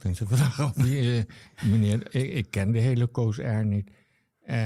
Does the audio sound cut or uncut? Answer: uncut